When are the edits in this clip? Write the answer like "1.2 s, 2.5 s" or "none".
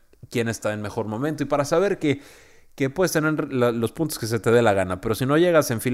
none